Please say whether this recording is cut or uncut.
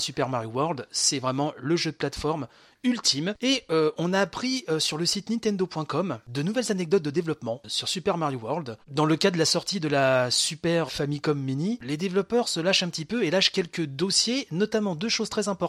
cut